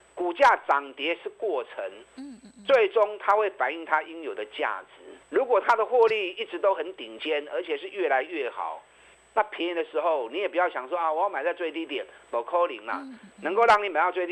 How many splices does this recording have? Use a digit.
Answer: 1